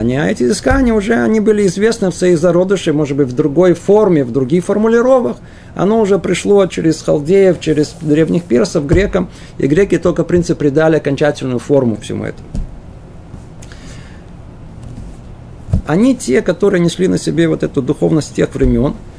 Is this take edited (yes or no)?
yes